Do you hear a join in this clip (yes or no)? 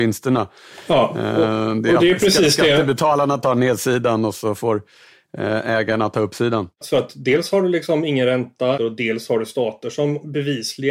yes